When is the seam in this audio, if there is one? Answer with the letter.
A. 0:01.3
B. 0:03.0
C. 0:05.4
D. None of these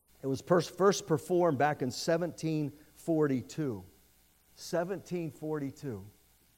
D